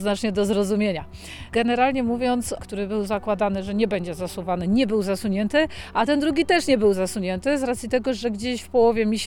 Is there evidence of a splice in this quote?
yes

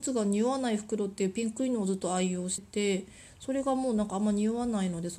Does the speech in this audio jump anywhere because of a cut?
yes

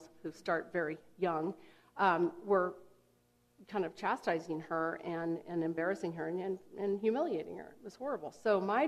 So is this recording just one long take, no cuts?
yes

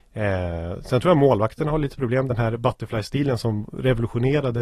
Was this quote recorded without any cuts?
yes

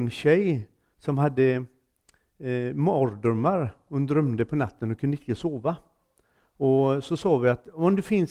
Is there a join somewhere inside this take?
no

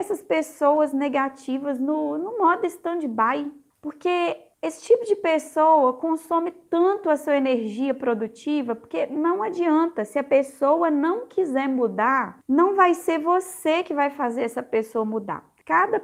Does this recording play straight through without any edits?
yes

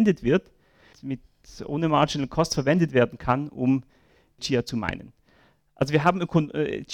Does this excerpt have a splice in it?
yes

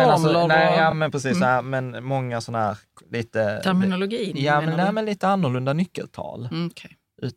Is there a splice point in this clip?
no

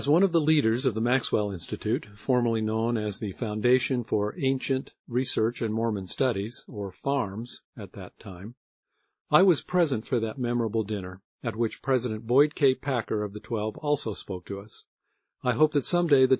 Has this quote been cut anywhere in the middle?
no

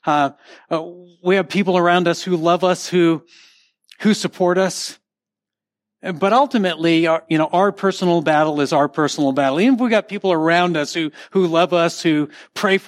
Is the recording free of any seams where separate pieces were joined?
yes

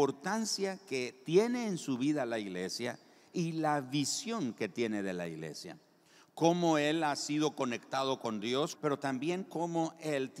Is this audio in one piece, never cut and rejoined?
no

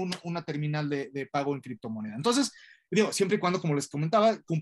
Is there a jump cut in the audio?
no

